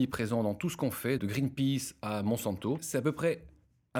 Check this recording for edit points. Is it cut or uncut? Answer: cut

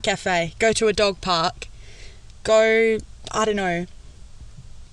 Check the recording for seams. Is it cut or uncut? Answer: uncut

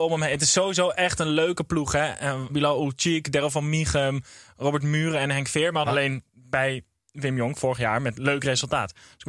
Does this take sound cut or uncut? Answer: cut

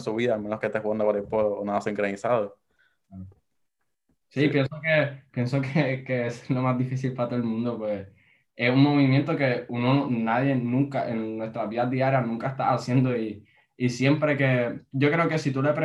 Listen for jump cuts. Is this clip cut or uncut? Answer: cut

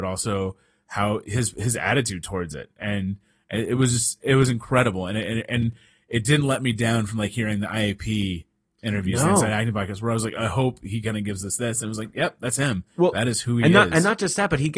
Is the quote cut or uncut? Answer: uncut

